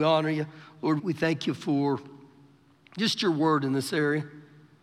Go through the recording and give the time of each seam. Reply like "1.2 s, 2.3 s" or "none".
1.0 s